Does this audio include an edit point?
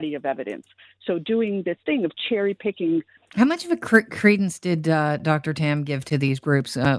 yes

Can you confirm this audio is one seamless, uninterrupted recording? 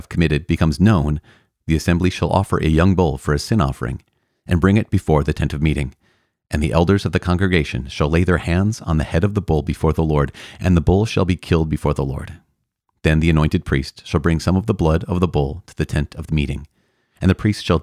yes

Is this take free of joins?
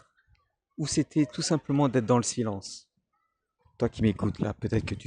no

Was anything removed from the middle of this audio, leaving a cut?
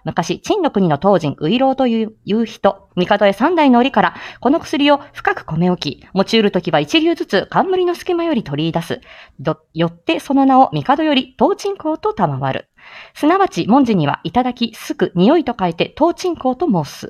yes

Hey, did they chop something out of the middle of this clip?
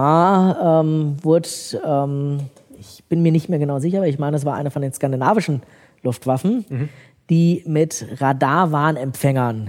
no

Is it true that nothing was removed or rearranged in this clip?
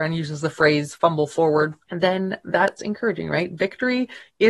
no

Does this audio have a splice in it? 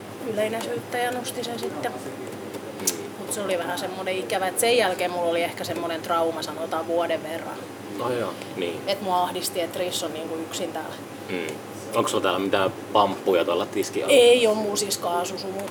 no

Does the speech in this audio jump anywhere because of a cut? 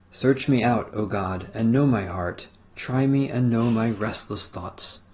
no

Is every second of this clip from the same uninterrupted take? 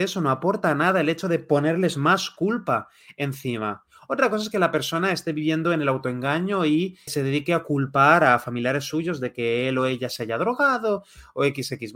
no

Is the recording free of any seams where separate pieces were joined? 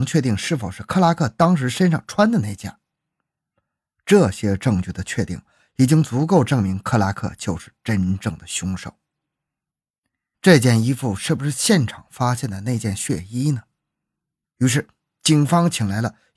no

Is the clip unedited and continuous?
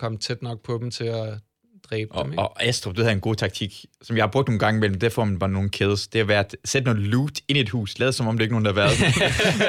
yes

